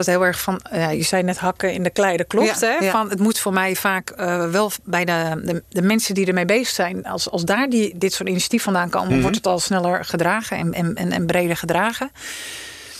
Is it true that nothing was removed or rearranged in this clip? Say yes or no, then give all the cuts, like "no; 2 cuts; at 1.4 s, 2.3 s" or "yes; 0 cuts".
yes; 0 cuts